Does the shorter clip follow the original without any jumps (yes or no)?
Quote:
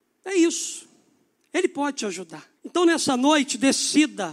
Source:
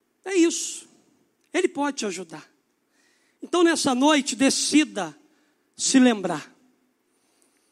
no